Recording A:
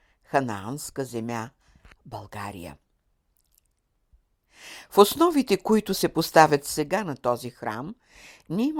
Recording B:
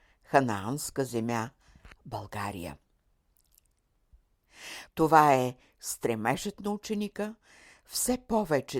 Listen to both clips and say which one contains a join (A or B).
B